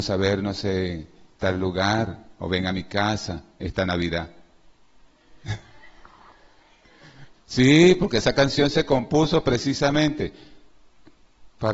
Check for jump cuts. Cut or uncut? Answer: cut